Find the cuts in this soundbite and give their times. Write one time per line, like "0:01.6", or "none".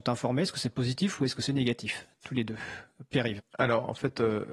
0:03.4